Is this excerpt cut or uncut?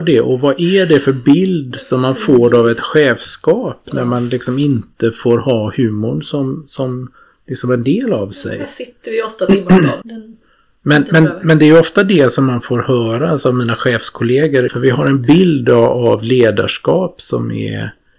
cut